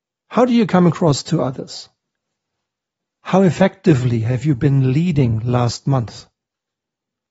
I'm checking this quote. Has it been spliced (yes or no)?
no